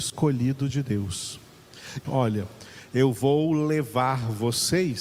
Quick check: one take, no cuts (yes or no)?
no